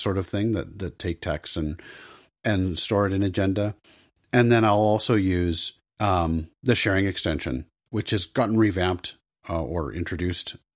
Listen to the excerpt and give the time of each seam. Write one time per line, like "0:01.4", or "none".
0:05.9
0:07.9

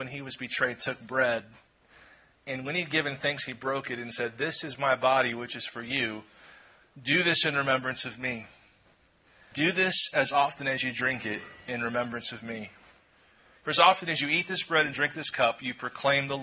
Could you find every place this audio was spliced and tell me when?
0:09.5

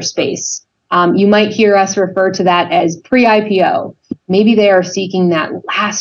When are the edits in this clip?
0:04.2

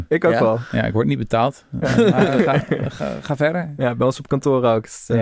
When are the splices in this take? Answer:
none

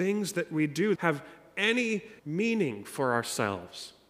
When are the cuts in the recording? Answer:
0:00.9
0:02.2

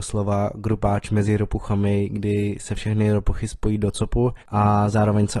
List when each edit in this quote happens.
0:04.4

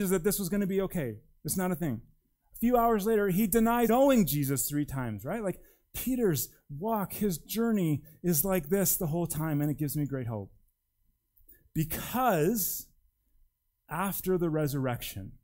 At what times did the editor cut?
0:03.9

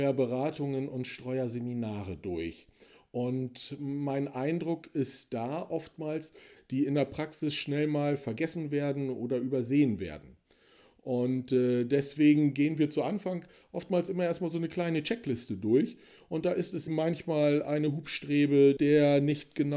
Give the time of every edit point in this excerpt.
0:06.6
0:16.9
0:18.8

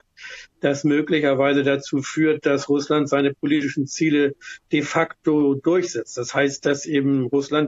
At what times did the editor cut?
none

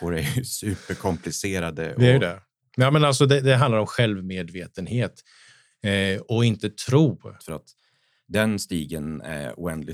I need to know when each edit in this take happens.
0:03.4
0:07.4

